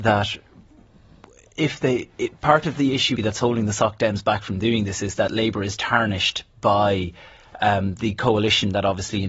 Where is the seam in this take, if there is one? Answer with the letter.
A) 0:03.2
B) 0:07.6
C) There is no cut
A